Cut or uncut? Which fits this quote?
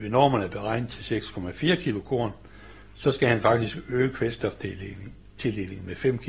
uncut